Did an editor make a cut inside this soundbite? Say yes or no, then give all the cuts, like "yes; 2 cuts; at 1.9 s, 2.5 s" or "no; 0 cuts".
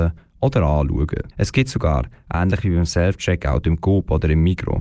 yes; 1 cut; at 1.3 s